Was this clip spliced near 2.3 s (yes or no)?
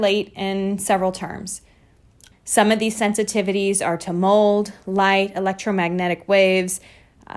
yes